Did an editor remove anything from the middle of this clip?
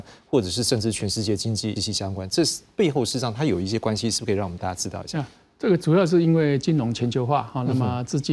yes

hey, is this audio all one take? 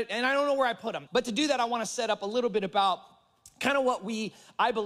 no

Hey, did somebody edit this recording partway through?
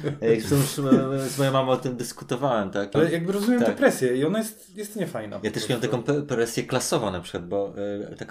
yes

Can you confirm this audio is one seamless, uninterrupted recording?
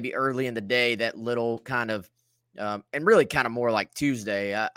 yes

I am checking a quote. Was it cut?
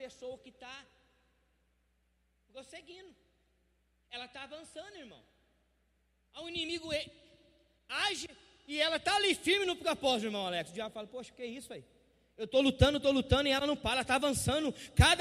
no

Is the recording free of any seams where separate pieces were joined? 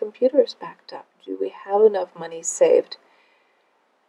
no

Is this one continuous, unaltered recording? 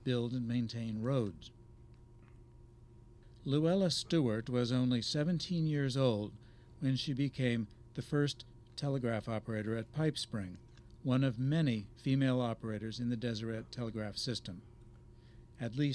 yes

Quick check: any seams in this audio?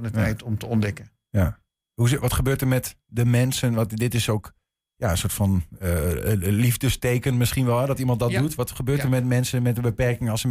no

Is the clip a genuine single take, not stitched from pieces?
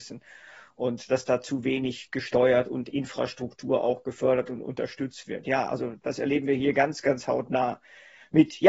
yes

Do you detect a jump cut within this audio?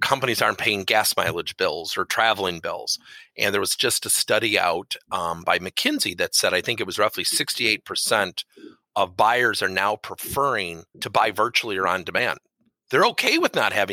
yes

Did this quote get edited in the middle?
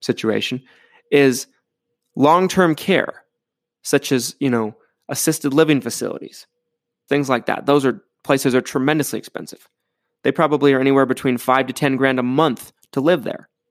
yes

